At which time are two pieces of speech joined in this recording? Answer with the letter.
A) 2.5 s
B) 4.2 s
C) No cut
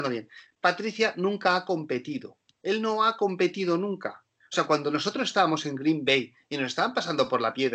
C